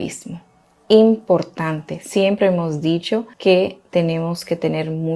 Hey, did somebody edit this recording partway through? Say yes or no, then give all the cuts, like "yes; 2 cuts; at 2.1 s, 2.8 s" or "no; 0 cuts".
yes; 1 cut; at 3.3 s